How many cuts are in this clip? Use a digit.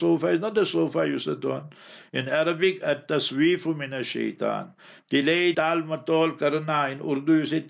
1